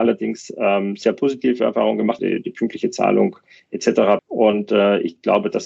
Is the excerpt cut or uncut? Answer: cut